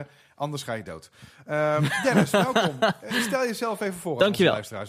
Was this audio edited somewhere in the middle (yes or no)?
no